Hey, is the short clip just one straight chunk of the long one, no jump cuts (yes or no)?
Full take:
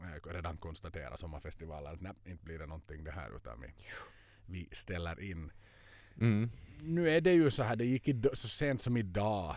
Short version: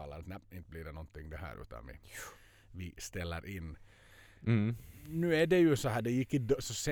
yes